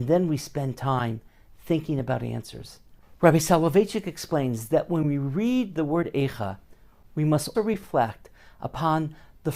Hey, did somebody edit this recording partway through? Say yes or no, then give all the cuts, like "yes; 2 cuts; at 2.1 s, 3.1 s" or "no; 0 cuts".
yes; 1 cut; at 7.5 s